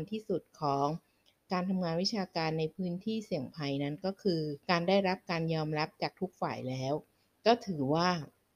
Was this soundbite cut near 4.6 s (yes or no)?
yes